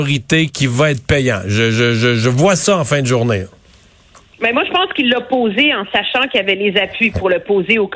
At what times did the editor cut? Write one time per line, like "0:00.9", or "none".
none